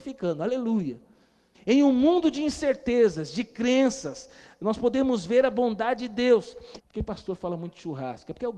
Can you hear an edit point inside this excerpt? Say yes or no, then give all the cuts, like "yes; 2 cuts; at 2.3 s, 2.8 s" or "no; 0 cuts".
yes; 2 cuts; at 1.5 s, 6.8 s